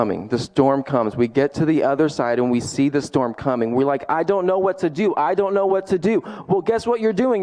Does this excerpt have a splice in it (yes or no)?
no